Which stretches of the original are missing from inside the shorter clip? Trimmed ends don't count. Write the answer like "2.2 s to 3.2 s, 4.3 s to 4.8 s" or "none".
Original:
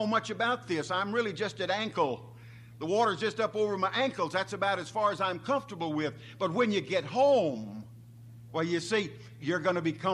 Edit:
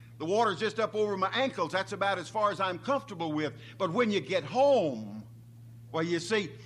none